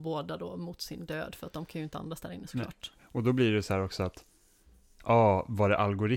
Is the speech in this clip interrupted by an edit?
no; 0 cuts

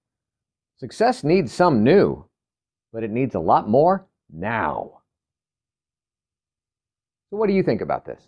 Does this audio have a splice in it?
no; 0 cuts

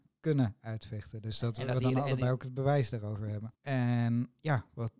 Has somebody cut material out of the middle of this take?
yes; 1 cut; at 3.5 s

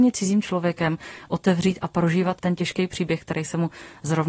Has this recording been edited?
yes; 1 cut; at 2.4 s

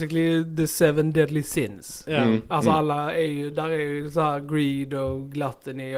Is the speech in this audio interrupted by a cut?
no; 0 cuts

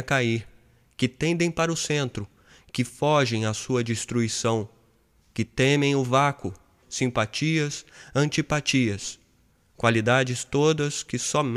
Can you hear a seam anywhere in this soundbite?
yes; 1 cut; at 6.8 s

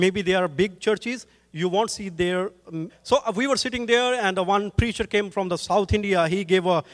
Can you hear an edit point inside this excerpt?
yes; 1 cut; at 2.9 s

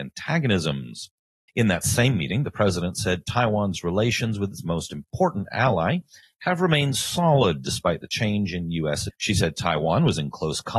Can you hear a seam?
yes; 3 cuts; at 1.5 s, 6.2 s, 9.1 s

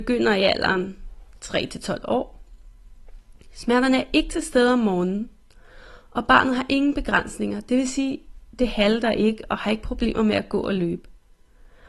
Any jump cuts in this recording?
no; 0 cuts

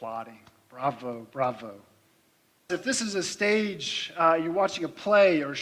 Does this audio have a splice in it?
yes; 1 cut; at 2.7 s

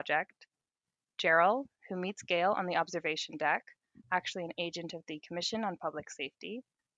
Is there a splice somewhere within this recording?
no; 0 cuts

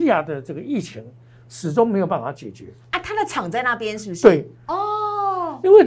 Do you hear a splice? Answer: no; 0 cuts

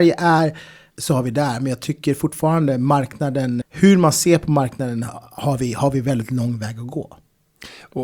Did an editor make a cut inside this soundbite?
yes; 2 cuts; at 0.9 s, 3.6 s

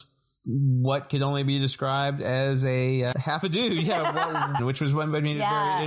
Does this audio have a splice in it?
yes; 2 cuts; at 3.1 s, 4.6 s

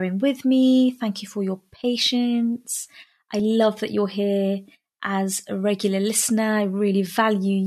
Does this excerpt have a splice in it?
no; 0 cuts

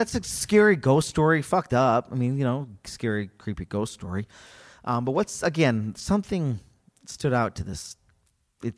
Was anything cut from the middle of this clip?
no; 0 cuts

